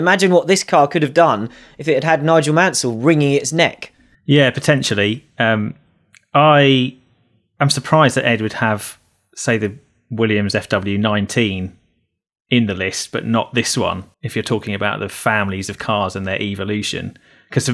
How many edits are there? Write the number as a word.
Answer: one